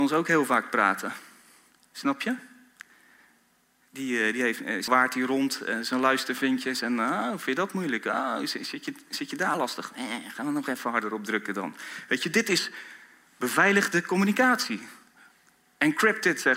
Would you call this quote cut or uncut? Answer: cut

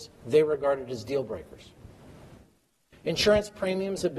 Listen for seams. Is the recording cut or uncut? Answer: cut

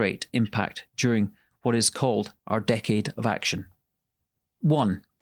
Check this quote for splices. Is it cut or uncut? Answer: uncut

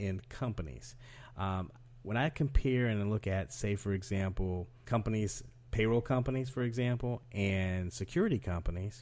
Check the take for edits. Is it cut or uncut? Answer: cut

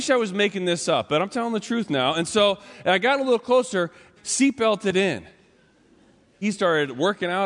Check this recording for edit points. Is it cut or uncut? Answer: cut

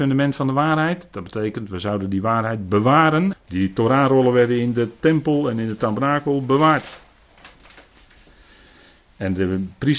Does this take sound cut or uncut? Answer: cut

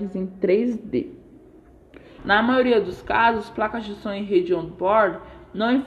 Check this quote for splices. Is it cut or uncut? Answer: cut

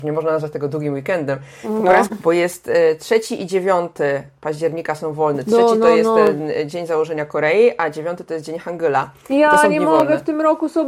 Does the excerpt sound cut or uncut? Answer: cut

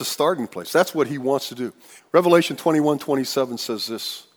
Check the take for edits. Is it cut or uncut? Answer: cut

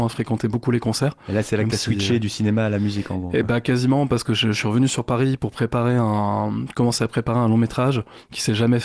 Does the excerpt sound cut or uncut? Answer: uncut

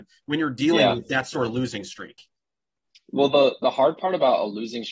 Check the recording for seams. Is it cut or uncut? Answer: uncut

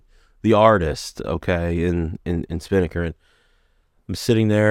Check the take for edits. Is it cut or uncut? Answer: cut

